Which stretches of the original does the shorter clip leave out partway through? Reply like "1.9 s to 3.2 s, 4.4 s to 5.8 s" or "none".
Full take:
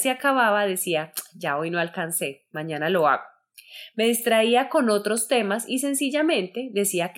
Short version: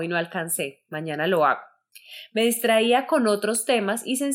none